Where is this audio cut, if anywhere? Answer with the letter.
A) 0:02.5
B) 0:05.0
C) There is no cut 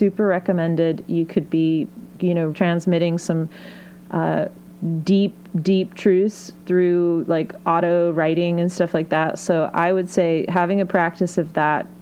A